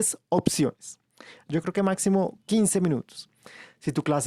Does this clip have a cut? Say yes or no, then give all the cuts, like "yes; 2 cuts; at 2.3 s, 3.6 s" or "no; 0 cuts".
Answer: yes; 1 cut; at 1.5 s